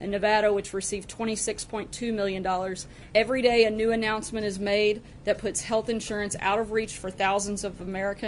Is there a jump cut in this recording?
yes; 1 cut; at 3.1 s

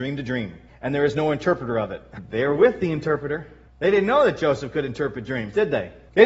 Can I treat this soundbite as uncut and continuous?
yes; 0 cuts

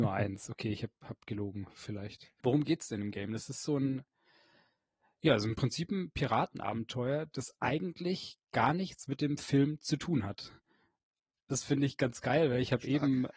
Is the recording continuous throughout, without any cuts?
no; 1 cut; at 2.4 s

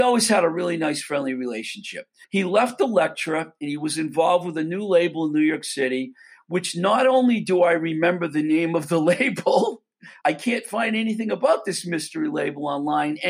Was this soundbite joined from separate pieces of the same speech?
yes; 2 cuts; at 2.2 s, 10.2 s

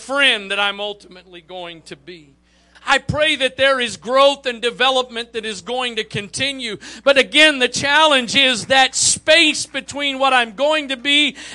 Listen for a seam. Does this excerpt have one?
yes; 1 cut; at 2.7 s

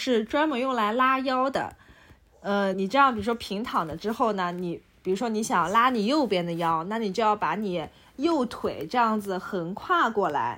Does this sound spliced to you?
yes; 1 cut; at 2.7 s

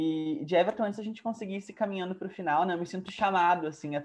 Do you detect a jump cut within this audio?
yes; 1 cut; at 3.1 s

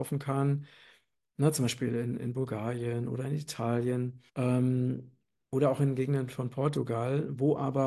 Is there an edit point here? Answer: yes; 1 cut; at 4.3 s

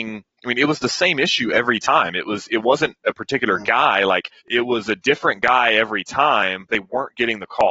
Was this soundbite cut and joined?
yes; 2 cuts; at 4.4 s, 6.7 s

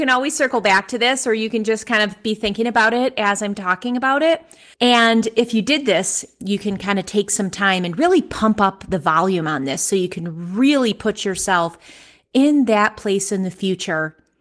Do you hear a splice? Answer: yes; 1 cut; at 4.7 s

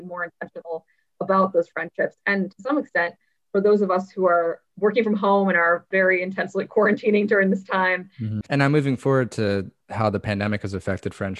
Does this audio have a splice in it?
yes; 1 cut; at 8.4 s

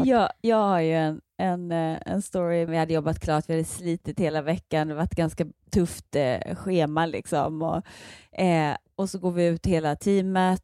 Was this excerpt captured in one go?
no; 1 cut; at 2.7 s

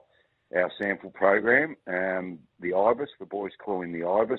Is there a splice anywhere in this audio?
no; 0 cuts

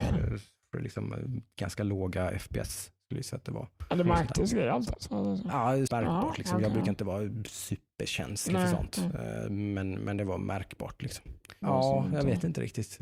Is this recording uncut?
no; 2 cuts; at 5.9 s, 11.6 s

